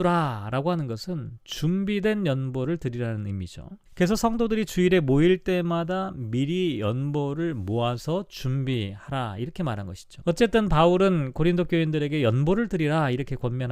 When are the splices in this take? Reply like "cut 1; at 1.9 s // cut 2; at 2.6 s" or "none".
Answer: cut 1; at 3.9 s // cut 2; at 10.2 s